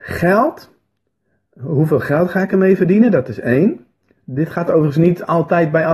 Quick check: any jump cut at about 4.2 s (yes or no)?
no